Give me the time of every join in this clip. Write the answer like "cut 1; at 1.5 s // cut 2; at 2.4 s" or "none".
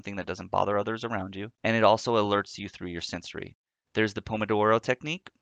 cut 1; at 1.5 s // cut 2; at 3.8 s